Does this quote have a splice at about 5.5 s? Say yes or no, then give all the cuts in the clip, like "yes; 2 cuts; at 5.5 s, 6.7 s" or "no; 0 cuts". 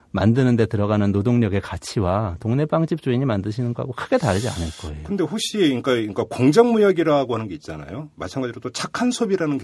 no; 0 cuts